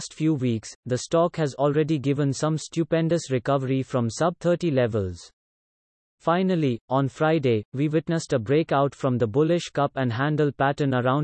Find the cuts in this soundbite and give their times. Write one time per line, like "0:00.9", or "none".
none